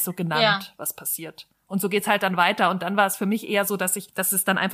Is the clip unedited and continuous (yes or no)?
yes